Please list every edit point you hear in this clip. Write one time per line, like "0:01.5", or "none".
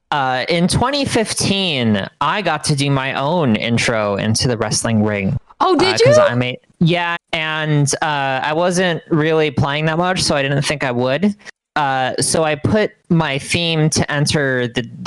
0:07.2